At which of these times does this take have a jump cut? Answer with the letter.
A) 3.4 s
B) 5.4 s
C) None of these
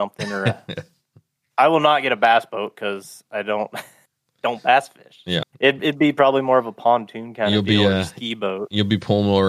B